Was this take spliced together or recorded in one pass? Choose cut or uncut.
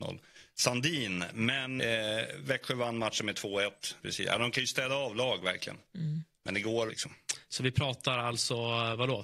cut